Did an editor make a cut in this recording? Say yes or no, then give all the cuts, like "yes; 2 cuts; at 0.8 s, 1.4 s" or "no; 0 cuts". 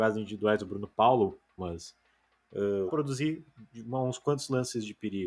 yes; 2 cuts; at 1.6 s, 2.9 s